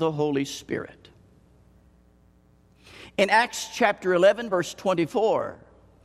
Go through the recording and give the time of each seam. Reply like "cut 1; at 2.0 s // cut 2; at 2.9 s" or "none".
none